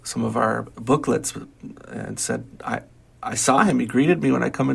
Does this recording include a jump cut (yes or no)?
no